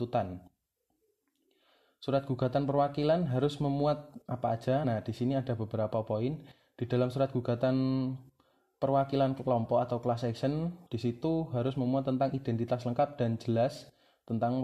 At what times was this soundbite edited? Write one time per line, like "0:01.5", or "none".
none